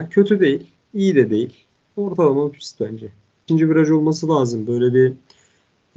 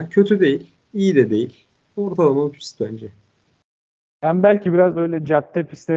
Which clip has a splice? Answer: first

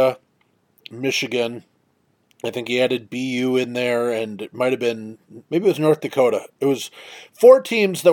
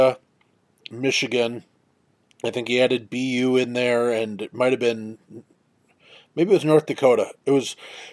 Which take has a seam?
first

